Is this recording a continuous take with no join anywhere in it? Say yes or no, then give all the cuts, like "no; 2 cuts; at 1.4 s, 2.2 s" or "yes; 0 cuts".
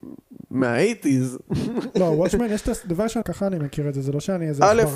no; 1 cut; at 3.2 s